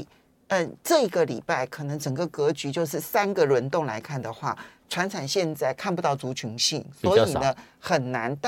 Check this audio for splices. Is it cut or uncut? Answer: uncut